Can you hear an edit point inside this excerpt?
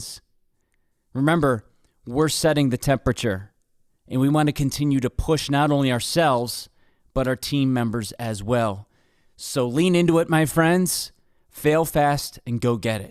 no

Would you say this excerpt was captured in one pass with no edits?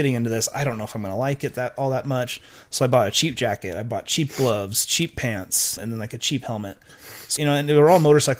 no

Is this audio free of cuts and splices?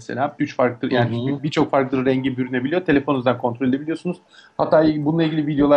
yes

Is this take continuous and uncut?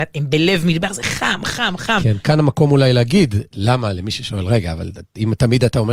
no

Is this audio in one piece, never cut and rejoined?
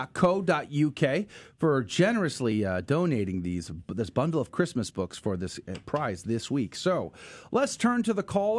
yes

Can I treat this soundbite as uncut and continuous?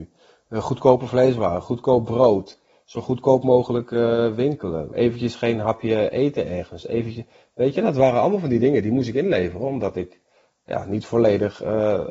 no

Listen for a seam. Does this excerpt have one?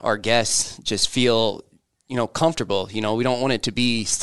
no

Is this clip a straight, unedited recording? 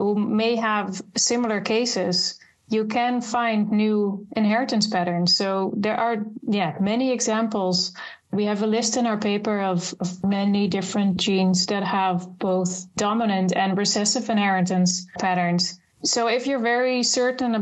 yes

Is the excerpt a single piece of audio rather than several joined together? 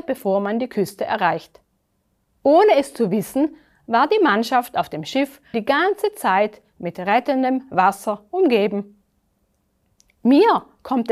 no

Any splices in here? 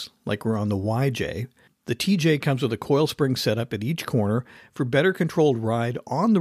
no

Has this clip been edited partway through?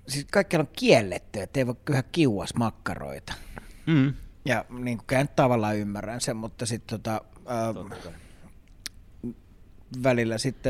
no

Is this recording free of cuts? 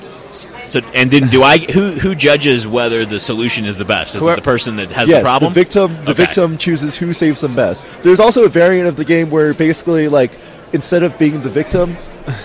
yes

